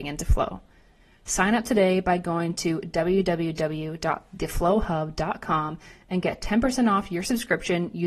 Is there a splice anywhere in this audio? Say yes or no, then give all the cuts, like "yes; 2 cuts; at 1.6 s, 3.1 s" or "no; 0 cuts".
no; 0 cuts